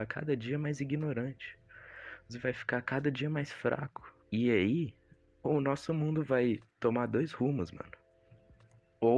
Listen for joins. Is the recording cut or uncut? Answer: cut